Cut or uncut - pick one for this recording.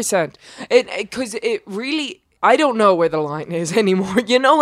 cut